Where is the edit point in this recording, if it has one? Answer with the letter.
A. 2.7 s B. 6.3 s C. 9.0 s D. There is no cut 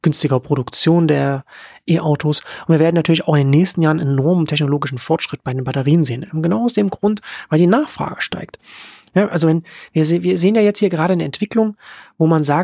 D